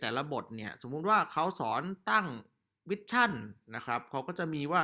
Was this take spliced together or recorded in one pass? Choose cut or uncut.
uncut